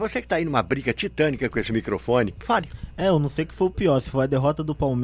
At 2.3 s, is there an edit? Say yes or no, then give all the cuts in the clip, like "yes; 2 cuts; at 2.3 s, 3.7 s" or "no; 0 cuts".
yes; 1 cut; at 2.3 s